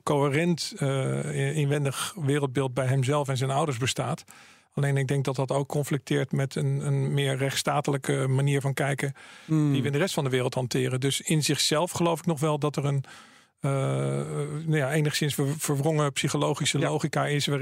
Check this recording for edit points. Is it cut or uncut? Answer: uncut